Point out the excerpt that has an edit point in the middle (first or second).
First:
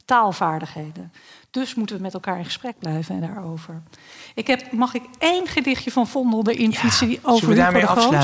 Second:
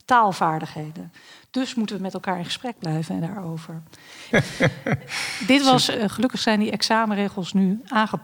second